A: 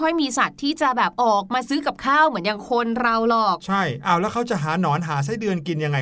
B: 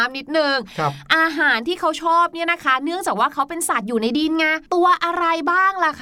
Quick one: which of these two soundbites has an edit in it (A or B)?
B